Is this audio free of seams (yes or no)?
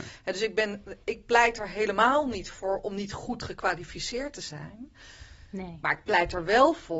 no